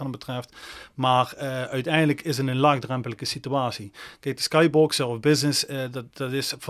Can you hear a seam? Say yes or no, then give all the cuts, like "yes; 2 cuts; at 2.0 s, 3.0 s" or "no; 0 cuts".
no; 0 cuts